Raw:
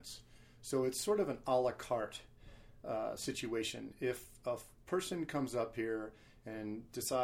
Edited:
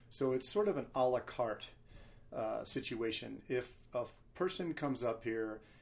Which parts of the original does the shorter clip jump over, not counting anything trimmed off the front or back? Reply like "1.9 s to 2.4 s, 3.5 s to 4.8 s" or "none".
none